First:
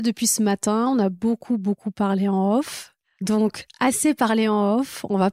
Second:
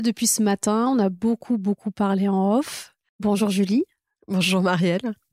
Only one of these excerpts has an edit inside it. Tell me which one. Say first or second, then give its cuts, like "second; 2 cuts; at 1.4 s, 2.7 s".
second; 1 cut; at 3.1 s